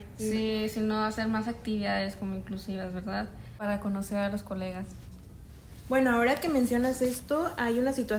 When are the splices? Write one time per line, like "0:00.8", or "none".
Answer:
none